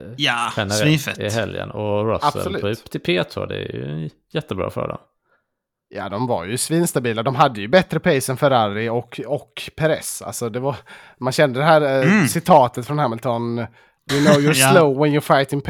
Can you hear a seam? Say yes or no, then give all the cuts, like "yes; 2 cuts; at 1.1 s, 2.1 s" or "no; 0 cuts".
yes; 1 cut; at 14.1 s